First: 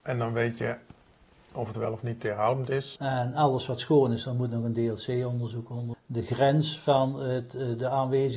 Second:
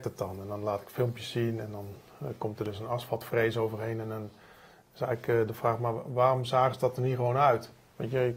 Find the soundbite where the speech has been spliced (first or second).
first